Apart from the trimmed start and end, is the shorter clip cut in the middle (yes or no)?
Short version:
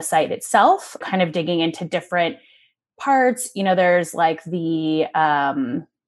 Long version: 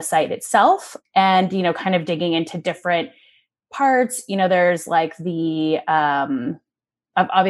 yes